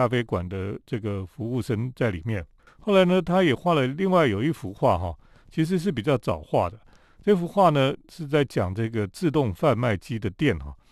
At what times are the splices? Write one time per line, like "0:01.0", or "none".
0:02.7